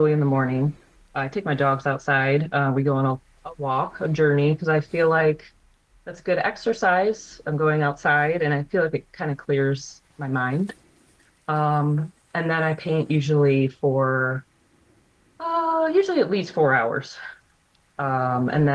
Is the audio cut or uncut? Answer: uncut